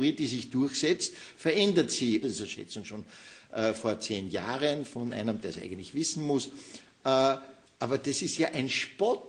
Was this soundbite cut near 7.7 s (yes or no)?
no